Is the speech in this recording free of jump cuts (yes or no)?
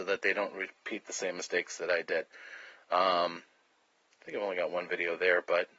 yes